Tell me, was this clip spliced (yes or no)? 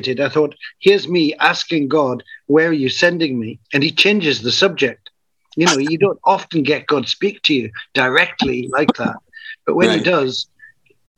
yes